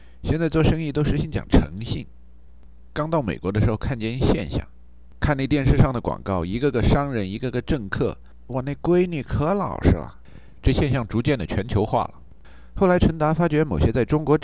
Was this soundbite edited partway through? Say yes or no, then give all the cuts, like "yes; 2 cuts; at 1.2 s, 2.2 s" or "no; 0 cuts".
yes; 1 cut; at 8.5 s